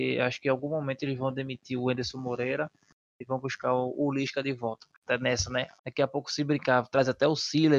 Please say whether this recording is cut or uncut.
cut